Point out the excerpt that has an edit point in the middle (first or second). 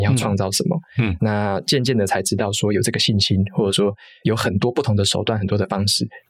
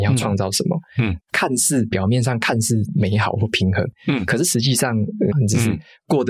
second